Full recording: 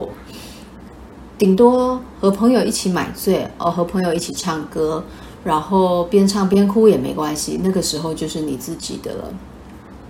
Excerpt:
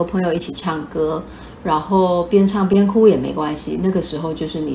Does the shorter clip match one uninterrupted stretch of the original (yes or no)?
yes